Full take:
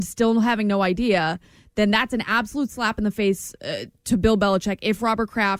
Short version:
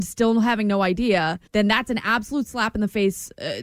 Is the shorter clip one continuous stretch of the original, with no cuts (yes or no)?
no